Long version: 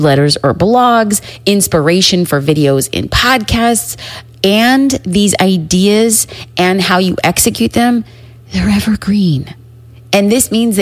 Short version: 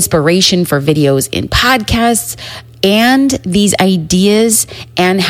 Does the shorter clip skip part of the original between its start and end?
no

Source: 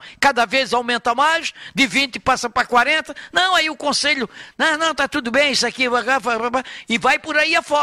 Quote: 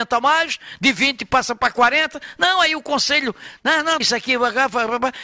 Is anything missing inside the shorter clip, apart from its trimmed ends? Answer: yes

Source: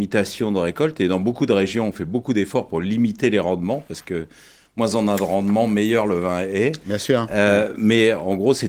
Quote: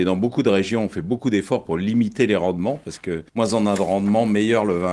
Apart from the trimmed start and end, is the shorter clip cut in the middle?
yes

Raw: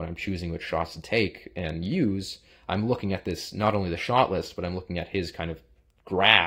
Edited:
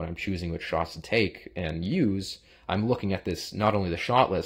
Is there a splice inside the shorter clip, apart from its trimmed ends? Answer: no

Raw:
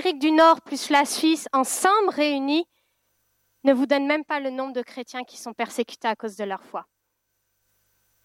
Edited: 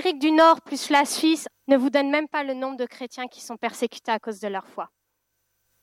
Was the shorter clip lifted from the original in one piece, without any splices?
no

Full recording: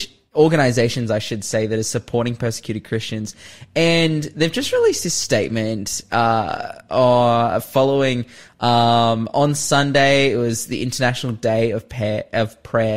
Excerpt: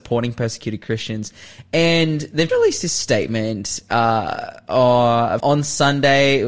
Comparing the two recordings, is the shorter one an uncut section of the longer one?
no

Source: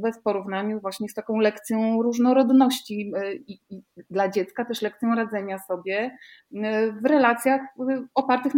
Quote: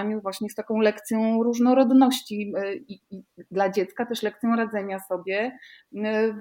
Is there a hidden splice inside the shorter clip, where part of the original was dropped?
no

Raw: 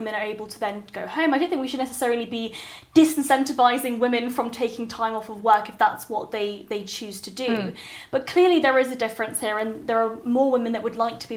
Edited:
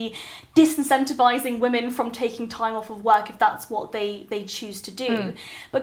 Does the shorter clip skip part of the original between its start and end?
no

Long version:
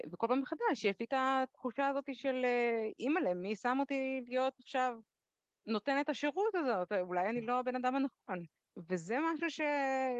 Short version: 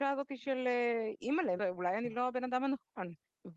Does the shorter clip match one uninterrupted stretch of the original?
no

